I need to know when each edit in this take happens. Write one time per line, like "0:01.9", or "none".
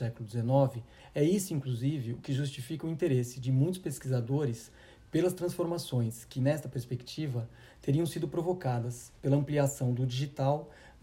0:01.0